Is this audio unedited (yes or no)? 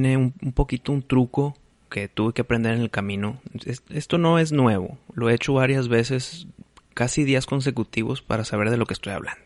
no